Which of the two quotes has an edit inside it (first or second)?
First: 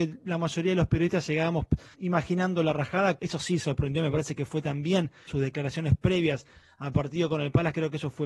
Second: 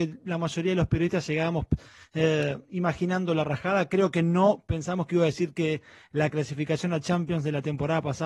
first